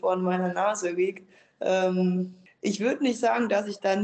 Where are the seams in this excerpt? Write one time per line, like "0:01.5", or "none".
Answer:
none